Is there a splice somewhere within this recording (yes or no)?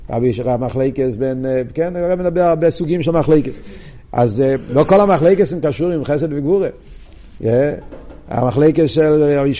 yes